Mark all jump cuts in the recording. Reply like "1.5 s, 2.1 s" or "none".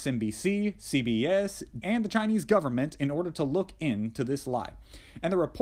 1.8 s